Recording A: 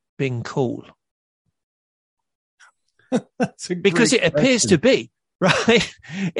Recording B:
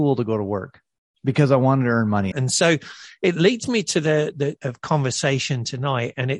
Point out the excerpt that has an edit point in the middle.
B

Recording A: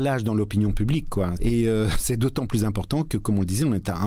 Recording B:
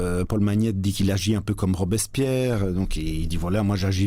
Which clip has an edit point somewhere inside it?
A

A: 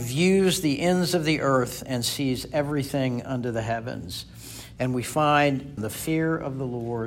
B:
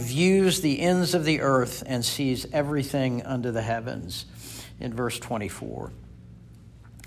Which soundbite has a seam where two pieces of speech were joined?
A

